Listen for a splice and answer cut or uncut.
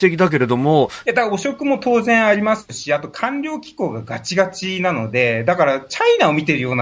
cut